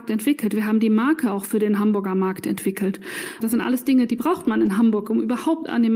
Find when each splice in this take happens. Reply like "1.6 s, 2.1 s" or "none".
3.4 s